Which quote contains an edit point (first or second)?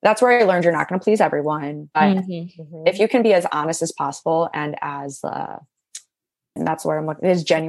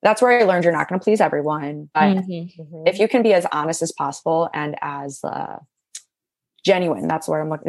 first